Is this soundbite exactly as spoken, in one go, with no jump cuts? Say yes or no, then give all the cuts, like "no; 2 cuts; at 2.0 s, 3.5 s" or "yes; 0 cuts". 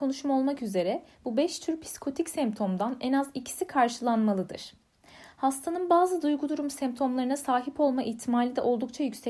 yes; 0 cuts